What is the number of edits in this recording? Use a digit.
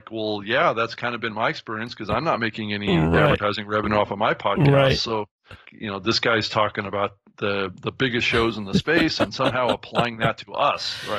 1